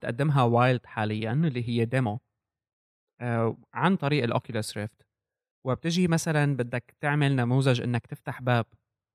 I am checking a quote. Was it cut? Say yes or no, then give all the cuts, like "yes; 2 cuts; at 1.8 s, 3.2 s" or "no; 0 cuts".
no; 0 cuts